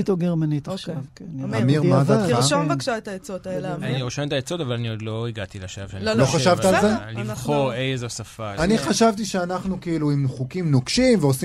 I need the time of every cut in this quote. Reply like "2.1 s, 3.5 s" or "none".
8.6 s

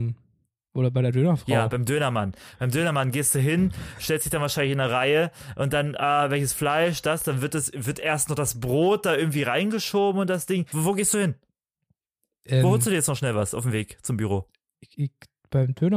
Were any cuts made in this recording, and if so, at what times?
10.7 s

